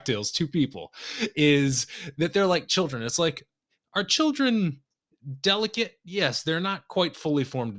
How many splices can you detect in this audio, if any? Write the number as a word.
zero